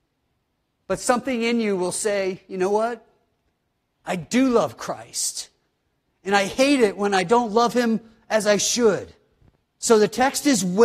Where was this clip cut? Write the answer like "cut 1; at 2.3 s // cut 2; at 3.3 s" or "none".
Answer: cut 1; at 9.6 s

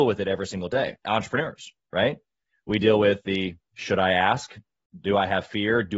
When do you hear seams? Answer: none

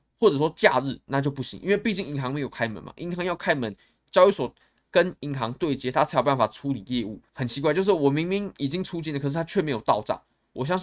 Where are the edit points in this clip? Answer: cut 1; at 7.3 s

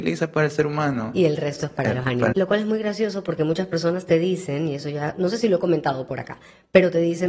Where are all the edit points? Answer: cut 1; at 2.3 s

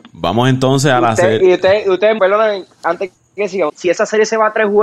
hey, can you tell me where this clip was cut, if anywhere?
cut 1; at 2.2 s // cut 2; at 3.7 s

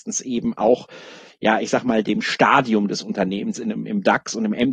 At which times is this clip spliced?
cut 1; at 2.0 s

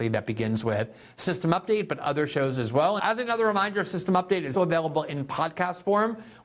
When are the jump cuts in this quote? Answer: cut 1; at 3.0 s // cut 2; at 4.5 s

